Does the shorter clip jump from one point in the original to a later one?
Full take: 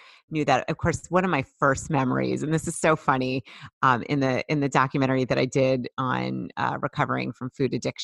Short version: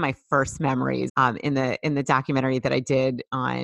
yes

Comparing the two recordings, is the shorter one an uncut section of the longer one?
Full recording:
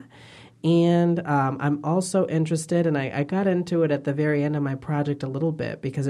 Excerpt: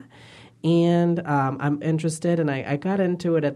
no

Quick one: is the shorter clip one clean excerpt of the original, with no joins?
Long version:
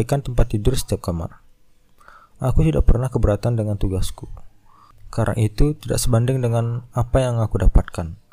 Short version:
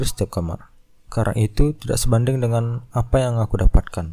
no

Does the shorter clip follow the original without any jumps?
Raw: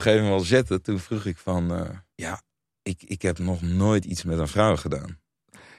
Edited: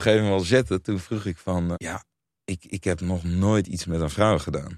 no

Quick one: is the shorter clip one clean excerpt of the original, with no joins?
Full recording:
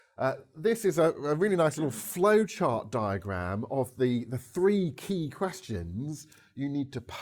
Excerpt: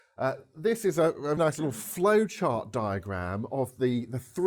no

